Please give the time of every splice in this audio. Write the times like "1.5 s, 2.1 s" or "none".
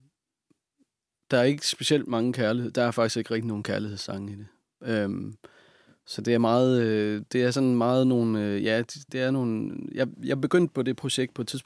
9.1 s, 10.1 s